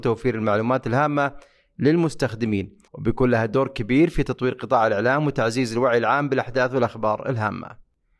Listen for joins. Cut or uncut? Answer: cut